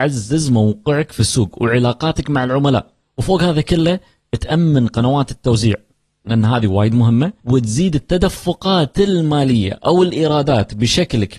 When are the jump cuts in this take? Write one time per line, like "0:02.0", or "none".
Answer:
none